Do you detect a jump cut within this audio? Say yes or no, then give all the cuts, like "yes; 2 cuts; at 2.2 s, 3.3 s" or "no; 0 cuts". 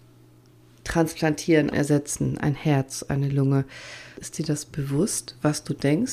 yes; 2 cuts; at 1.7 s, 4.1 s